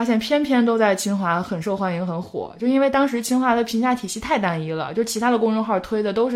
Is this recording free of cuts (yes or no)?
yes